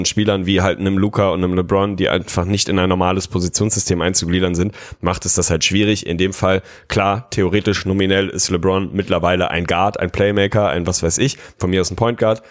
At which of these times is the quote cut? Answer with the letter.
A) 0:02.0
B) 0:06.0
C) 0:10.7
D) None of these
D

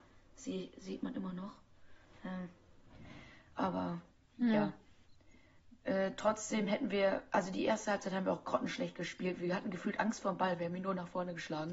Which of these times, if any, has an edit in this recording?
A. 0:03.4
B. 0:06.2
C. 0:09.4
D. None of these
D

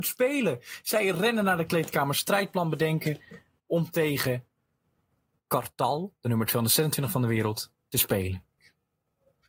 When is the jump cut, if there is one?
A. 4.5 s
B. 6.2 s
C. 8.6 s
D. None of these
C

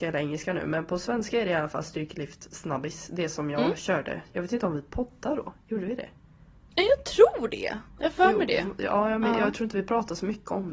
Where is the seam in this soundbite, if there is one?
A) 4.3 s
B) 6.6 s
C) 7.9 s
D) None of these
C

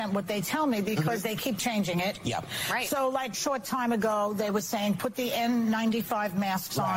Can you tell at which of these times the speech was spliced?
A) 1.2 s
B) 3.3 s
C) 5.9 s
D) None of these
B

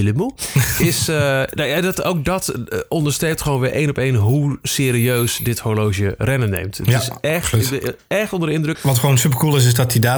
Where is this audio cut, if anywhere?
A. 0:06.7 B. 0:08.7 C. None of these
B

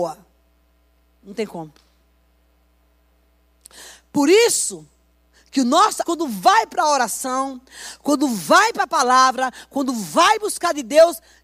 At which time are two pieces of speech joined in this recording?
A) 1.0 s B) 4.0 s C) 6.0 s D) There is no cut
C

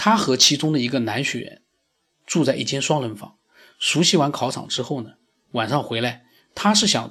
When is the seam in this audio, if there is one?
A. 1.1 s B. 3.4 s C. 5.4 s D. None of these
D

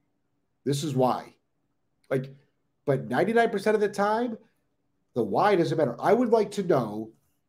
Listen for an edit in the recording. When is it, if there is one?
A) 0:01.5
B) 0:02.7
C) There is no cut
B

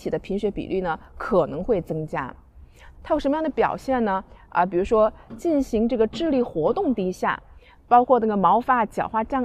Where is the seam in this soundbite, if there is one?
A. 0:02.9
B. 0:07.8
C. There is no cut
A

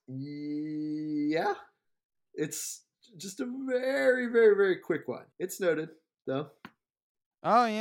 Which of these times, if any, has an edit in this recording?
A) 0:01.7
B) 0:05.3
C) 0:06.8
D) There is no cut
B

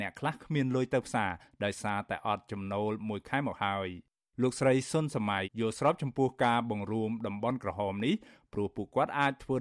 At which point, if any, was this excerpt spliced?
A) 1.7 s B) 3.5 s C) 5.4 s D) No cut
C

